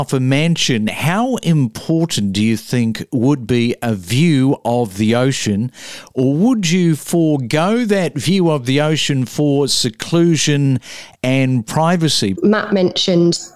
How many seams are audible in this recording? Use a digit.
1